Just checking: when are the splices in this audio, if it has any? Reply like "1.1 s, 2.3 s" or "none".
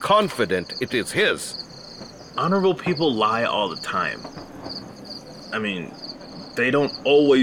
2.3 s